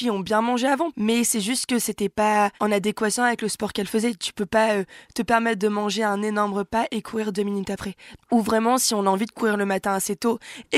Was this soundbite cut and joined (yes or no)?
yes